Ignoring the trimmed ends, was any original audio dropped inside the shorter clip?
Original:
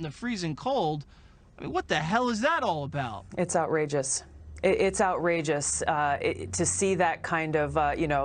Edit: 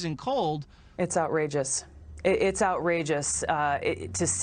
yes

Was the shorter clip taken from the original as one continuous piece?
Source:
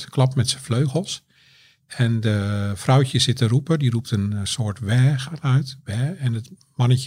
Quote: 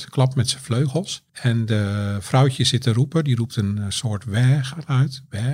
no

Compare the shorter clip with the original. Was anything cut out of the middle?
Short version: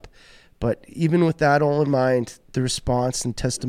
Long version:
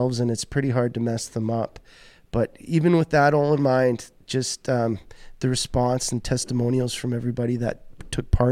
yes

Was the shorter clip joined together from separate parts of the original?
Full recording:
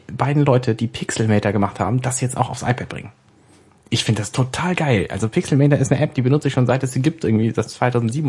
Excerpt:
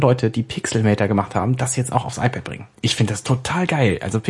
yes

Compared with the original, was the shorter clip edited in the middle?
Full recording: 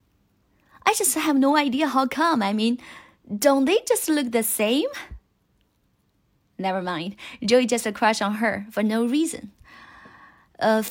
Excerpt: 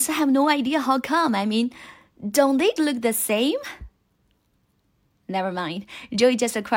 yes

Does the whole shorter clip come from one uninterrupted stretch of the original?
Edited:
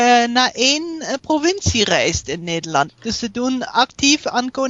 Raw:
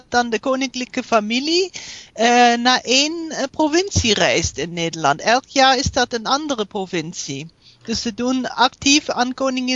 no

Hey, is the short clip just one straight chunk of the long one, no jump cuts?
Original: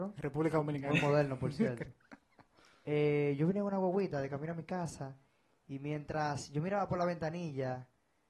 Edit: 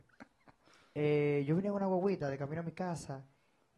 yes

